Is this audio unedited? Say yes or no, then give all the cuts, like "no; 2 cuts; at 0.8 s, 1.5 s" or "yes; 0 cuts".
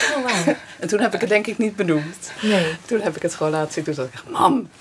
yes; 0 cuts